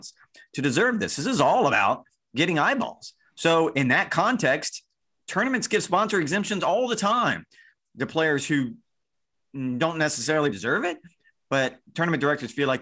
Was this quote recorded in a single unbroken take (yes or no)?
no